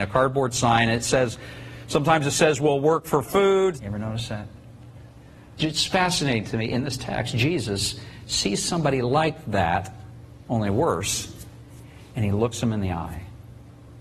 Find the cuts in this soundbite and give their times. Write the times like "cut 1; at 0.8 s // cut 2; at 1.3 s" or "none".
cut 1; at 3.8 s // cut 2; at 5.6 s